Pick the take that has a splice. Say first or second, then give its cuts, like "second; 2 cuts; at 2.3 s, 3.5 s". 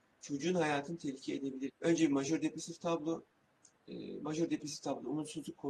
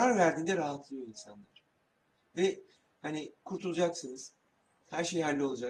first; 1 cut; at 1.7 s